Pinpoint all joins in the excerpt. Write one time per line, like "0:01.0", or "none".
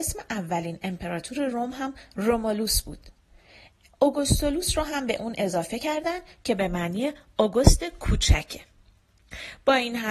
none